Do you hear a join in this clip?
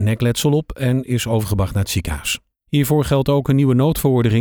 yes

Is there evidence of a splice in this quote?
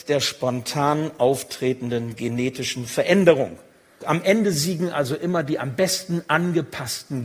yes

